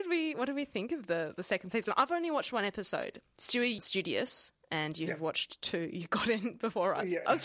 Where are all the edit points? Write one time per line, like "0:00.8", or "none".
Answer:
0:03.8